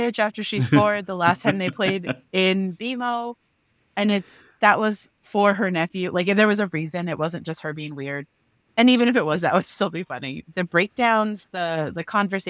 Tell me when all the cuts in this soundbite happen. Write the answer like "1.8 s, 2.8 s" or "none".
10.5 s